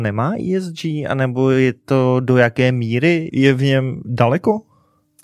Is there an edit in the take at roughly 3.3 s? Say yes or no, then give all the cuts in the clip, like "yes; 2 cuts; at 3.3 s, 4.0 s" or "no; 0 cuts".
yes; 1 cut; at 3.3 s